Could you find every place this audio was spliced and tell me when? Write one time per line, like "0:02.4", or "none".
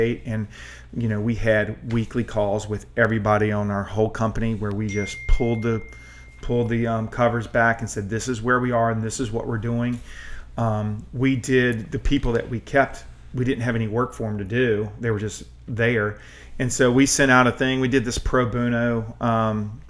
none